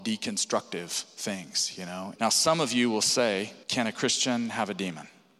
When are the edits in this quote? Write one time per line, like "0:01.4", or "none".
0:02.2
0:03.6